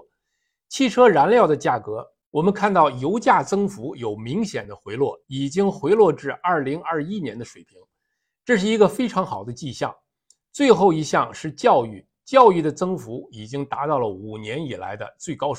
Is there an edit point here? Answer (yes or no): no